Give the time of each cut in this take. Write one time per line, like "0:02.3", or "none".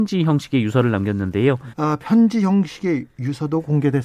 0:01.7